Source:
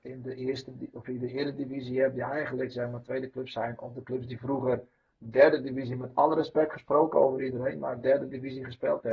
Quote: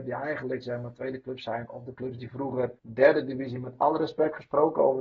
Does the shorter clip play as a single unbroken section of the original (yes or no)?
no